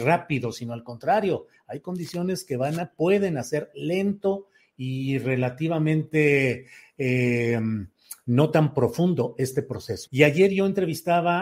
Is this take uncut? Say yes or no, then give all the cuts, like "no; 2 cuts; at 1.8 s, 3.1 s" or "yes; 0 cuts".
no; 1 cut; at 10.1 s